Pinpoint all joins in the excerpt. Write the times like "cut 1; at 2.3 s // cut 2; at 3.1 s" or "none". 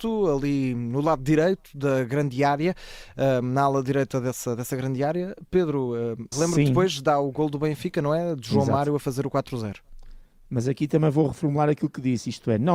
cut 1; at 6.3 s